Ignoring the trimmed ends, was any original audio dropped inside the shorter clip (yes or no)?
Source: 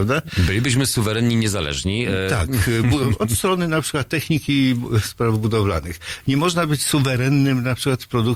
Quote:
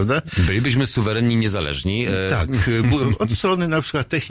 no